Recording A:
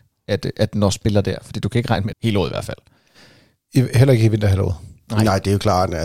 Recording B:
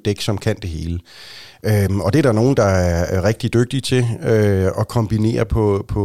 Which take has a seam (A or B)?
A